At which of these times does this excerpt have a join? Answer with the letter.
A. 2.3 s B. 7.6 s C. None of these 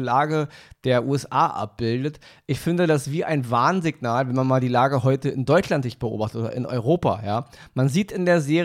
C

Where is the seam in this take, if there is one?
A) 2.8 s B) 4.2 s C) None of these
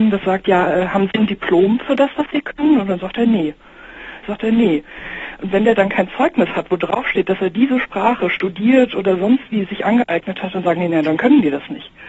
B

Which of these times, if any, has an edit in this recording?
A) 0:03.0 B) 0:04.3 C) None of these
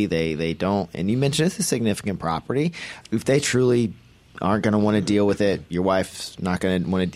A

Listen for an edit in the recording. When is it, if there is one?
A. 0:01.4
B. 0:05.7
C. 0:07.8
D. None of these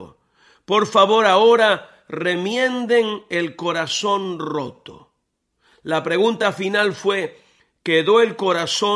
D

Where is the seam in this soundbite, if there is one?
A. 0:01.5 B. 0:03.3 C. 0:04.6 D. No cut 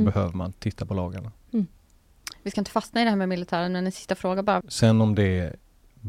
C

